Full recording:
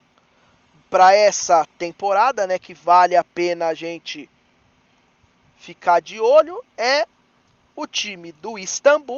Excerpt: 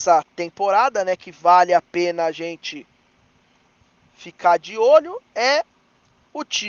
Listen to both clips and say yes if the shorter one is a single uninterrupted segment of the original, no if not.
yes